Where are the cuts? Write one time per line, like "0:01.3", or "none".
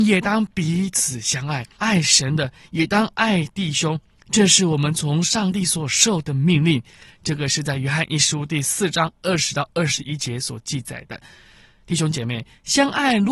0:01.8